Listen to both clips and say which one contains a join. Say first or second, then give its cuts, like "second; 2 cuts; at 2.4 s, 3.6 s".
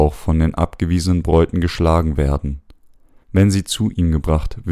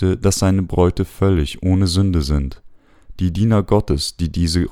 first; 1 cut; at 3.2 s